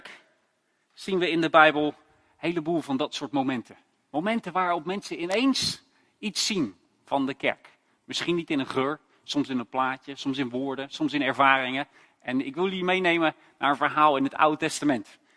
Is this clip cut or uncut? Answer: uncut